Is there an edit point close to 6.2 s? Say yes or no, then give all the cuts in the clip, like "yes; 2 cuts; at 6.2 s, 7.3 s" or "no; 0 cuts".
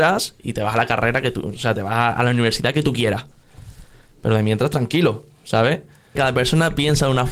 yes; 1 cut; at 6.2 s